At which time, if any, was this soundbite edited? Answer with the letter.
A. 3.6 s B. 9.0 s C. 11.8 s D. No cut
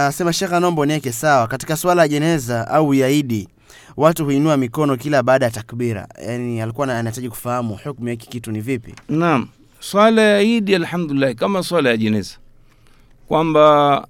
B